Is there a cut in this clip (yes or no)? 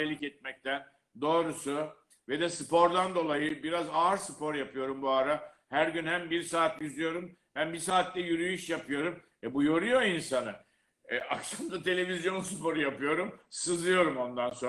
no